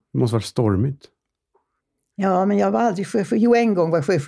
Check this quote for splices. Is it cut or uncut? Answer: uncut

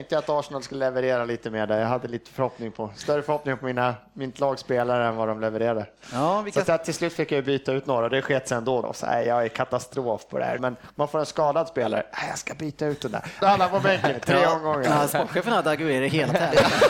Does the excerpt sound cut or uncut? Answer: cut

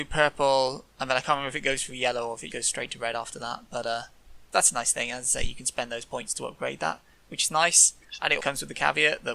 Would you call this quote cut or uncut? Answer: cut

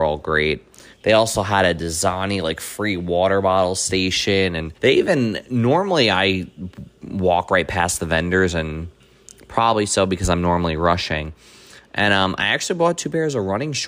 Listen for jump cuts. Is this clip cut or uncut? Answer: cut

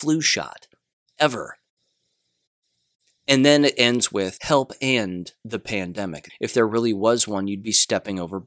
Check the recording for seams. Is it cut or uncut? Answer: cut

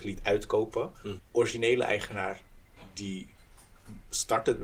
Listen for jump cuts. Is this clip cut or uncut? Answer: cut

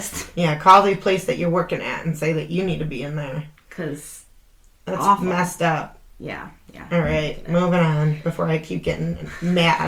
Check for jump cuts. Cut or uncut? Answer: uncut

